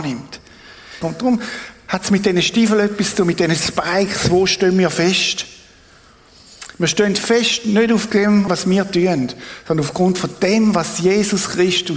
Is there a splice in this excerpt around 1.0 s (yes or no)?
yes